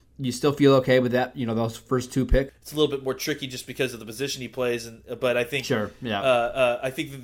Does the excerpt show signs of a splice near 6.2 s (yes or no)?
no